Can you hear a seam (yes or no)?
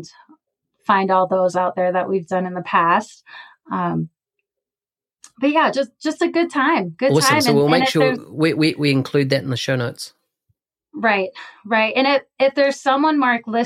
no